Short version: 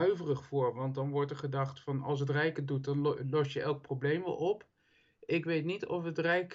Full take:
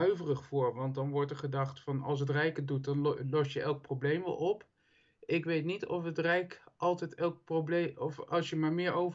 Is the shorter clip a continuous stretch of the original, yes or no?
yes